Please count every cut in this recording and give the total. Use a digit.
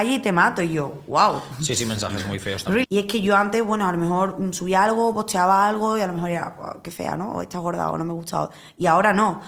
1